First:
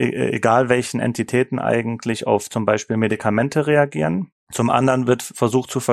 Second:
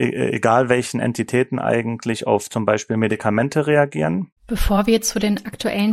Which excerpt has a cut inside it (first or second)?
second